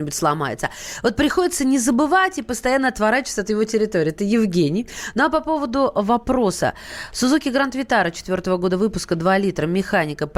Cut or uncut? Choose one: uncut